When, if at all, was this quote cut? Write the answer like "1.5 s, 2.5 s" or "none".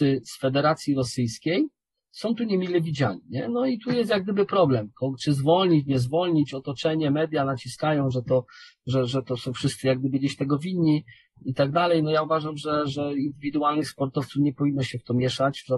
none